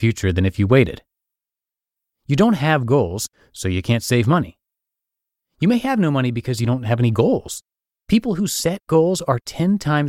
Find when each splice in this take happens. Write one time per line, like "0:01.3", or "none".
none

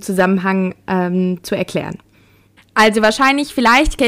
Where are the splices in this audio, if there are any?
0:02.6

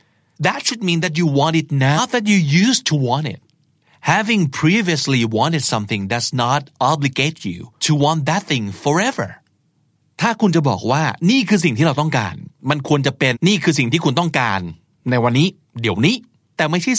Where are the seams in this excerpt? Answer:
0:02.0
0:13.3

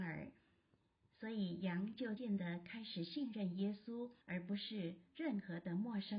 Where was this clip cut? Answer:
0:02.2
0:04.2

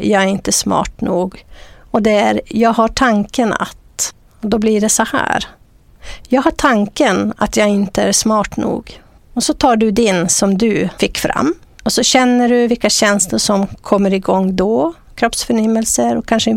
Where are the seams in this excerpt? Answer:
none

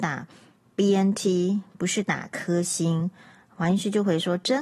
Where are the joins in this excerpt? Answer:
none

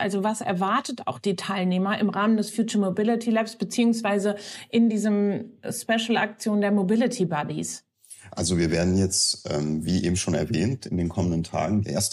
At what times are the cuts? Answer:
none

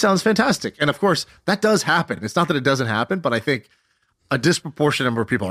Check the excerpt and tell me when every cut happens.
none

